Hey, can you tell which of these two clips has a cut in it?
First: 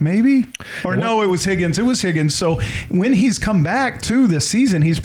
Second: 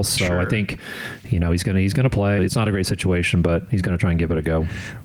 second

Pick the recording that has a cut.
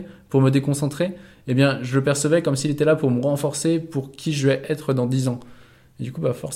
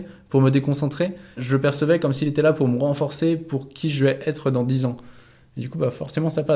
second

